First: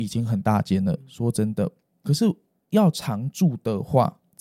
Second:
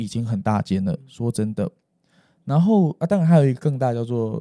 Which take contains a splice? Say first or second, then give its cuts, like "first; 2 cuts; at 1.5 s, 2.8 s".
first; 1 cut; at 2.0 s